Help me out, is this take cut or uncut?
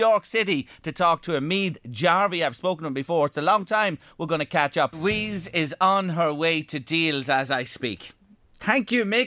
uncut